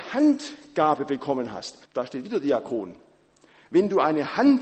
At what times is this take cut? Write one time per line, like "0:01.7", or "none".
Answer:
0:01.9

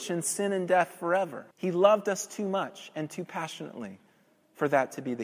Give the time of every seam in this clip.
0:01.5

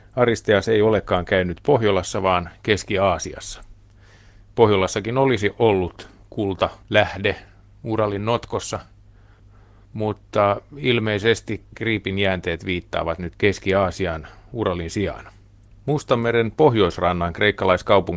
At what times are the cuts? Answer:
0:15.7

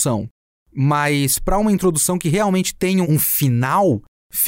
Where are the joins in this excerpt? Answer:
0:03.0

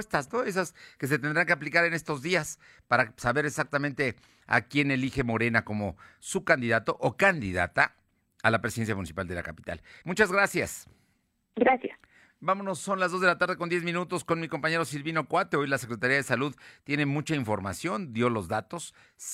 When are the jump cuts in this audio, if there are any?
none

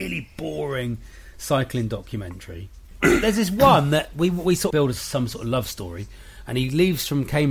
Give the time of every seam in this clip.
0:04.7

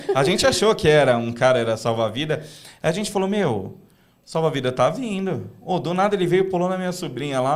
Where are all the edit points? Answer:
none

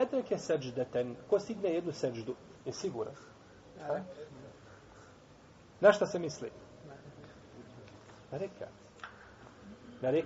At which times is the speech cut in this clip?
0:02.6

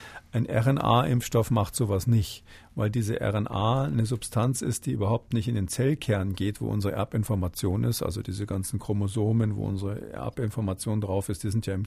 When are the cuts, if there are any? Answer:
none

